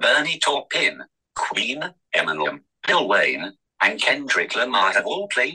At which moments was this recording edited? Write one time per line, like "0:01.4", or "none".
none